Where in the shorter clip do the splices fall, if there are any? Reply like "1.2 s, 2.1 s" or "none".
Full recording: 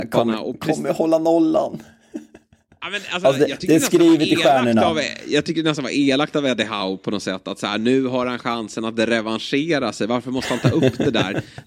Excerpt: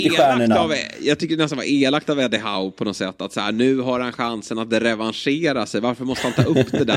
none